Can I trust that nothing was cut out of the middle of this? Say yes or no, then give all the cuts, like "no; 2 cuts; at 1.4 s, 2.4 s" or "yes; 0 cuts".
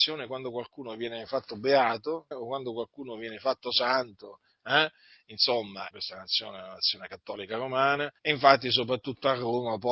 no; 3 cuts; at 2.3 s, 5.9 s, 8.2 s